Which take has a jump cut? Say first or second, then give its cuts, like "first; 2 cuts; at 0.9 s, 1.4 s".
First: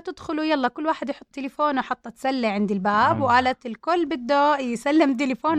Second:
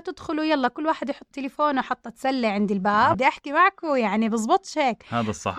second; 1 cut; at 3.1 s